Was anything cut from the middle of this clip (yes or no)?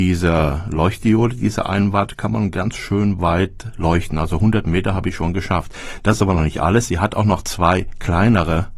no